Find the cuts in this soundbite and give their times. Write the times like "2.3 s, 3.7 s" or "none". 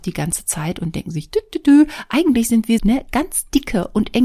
2.8 s